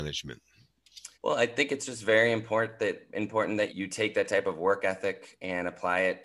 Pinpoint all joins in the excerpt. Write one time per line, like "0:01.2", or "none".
0:01.1
0:03.7